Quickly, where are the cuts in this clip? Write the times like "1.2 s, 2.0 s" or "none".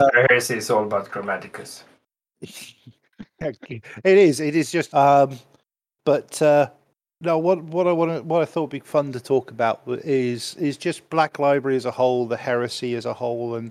4.9 s